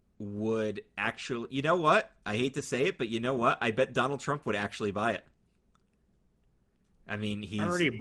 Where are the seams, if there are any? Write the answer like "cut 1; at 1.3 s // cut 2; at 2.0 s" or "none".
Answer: none